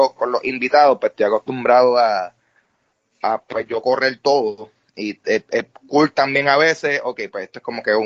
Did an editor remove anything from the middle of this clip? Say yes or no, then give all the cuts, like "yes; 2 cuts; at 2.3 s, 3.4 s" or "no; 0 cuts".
no; 0 cuts